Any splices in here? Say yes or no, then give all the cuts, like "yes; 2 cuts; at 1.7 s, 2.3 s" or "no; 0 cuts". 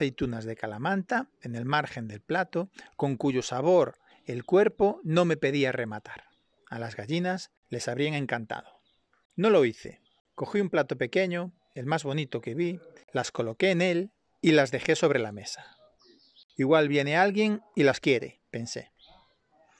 yes; 1 cut; at 6.6 s